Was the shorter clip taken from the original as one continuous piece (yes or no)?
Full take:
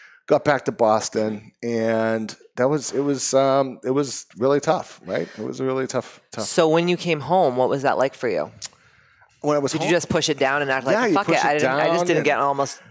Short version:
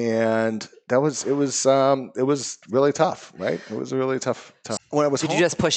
no